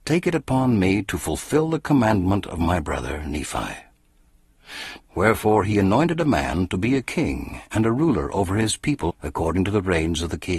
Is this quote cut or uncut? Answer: cut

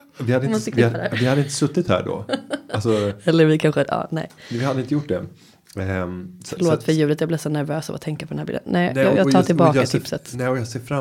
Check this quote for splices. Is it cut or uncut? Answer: uncut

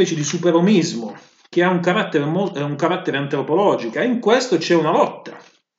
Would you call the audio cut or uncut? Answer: cut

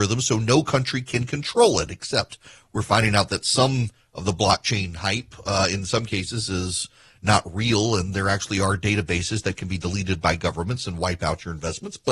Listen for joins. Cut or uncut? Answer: uncut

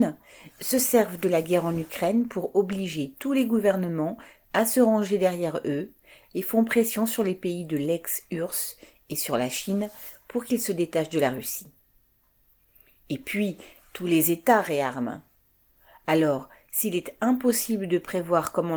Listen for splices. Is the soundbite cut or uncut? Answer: uncut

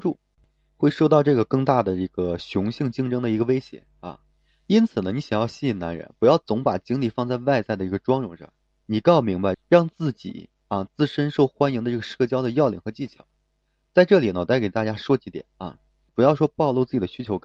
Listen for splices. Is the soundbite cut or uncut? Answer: cut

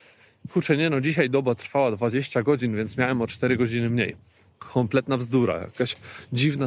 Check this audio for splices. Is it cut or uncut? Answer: uncut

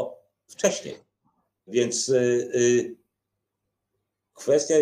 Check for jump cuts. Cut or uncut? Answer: uncut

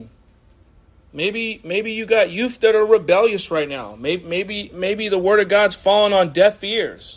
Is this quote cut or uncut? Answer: uncut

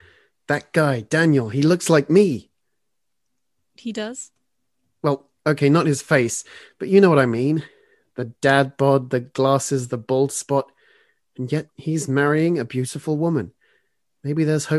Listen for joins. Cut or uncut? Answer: uncut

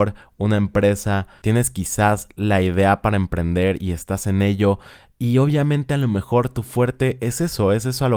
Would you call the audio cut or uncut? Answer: uncut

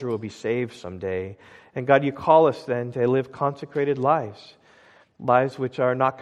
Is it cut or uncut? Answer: uncut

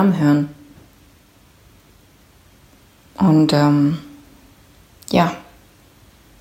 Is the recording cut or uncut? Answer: uncut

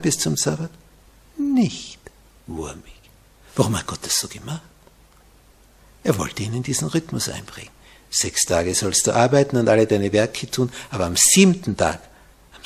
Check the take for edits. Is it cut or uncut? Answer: uncut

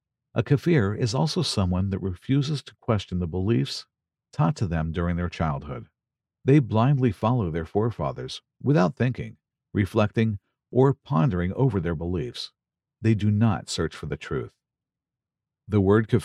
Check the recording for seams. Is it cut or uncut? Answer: uncut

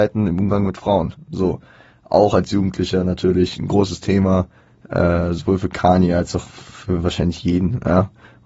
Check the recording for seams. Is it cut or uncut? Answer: uncut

